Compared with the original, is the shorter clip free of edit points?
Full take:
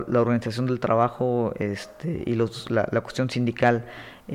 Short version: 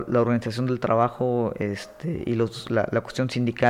yes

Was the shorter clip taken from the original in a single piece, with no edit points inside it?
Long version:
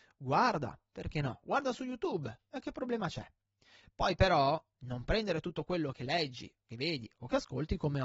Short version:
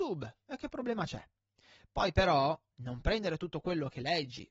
yes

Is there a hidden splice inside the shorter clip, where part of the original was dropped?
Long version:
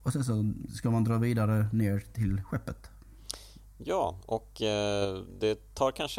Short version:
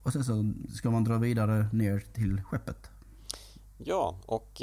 no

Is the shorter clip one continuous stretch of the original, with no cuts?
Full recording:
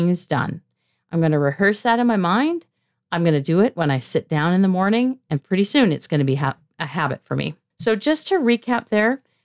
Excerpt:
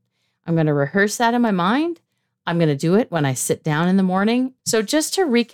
no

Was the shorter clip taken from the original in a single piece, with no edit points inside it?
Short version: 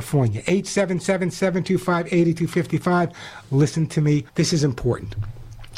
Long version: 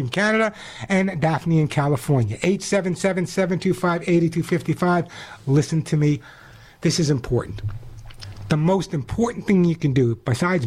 no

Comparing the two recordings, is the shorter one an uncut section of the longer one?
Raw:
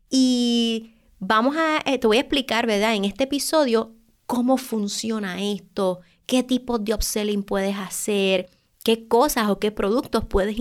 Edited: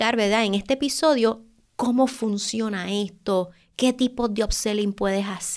yes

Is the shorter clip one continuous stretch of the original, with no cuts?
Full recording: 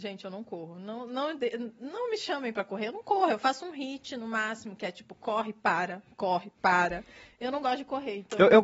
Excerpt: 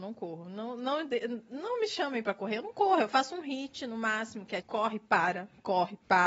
no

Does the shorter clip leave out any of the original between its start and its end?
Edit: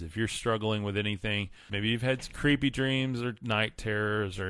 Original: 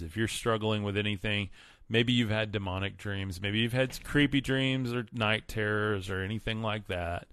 yes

